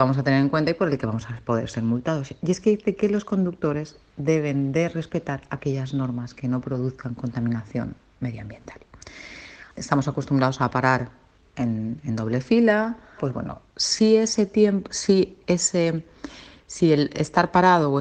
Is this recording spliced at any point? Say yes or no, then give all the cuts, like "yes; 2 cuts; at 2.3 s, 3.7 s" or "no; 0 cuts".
yes; 2 cuts; at 9.7 s, 13.2 s